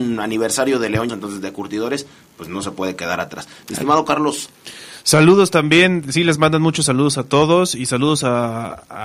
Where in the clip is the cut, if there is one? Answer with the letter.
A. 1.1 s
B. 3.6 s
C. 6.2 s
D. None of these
A